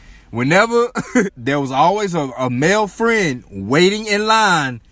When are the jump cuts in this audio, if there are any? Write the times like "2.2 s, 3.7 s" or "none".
1.3 s